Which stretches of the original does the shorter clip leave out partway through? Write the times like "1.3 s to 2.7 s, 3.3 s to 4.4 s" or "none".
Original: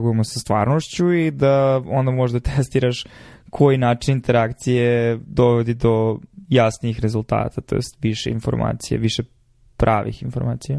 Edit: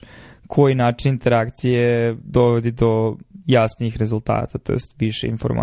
none